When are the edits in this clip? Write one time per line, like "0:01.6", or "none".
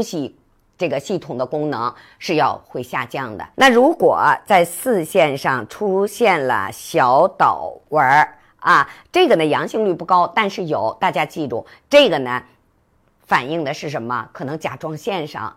0:03.5